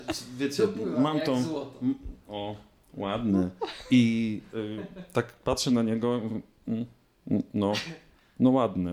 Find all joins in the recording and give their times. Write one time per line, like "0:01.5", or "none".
none